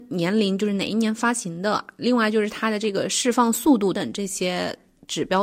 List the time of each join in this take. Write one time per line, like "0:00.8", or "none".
0:03.9